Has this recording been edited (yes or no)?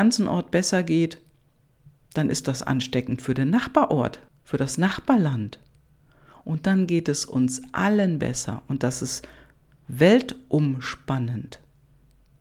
yes